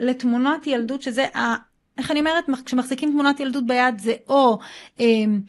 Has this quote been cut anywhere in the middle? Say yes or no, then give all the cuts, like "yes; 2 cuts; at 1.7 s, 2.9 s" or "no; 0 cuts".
no; 0 cuts